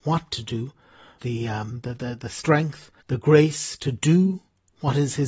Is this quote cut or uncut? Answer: cut